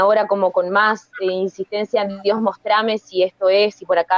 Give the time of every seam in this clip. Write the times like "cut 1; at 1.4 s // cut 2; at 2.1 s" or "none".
none

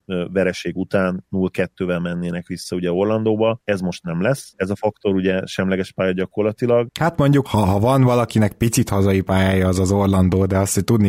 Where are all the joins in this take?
cut 1; at 7.4 s

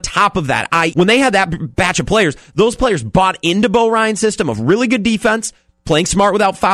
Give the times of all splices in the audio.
cut 1; at 0.9 s

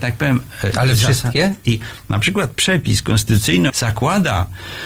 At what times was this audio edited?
cut 1; at 1.6 s // cut 2; at 3.7 s

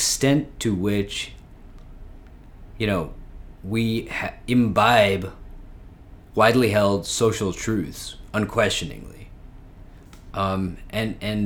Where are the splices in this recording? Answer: none

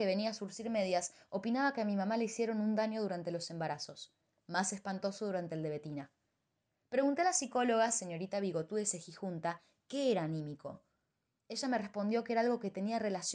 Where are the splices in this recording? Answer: none

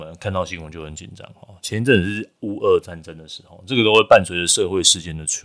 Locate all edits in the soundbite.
none

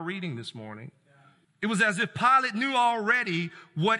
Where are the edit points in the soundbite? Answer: cut 1; at 1.4 s

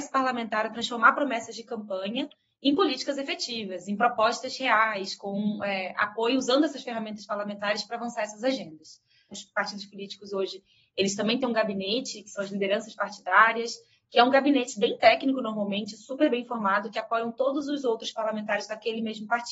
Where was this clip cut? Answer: cut 1; at 9.3 s

